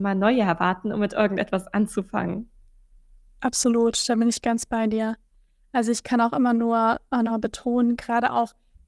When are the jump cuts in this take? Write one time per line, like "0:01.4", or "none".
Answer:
none